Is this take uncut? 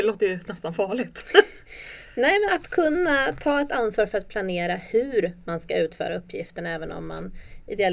no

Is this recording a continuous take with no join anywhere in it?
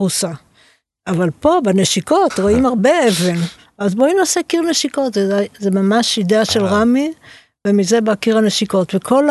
yes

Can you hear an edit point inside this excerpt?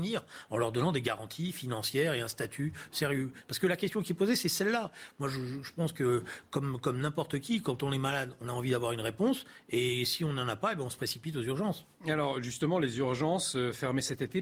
no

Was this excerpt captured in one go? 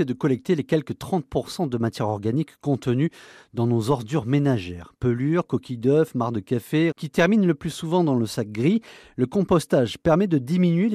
no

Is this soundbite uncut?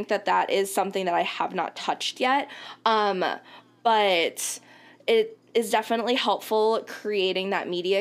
yes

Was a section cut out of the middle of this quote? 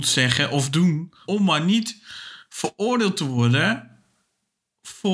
yes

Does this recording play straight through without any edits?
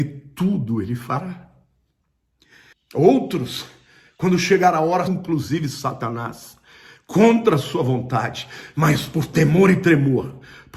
no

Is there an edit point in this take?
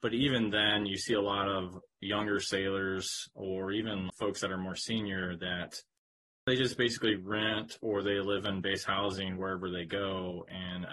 yes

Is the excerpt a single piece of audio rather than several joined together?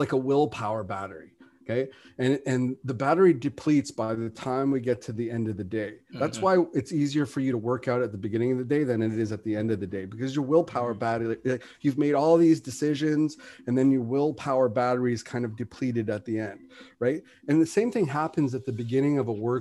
yes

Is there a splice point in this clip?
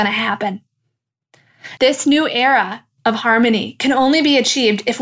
yes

